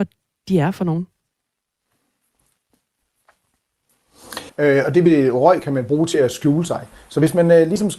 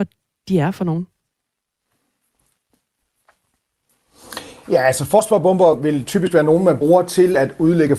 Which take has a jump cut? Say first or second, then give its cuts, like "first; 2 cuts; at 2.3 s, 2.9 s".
first; 1 cut; at 4.5 s